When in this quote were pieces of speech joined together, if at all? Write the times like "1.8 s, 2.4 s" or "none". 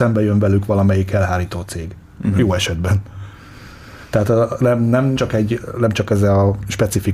5.2 s